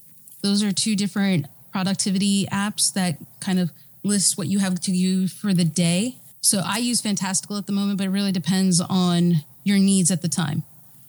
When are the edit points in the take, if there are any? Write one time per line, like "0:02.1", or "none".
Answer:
0:06.3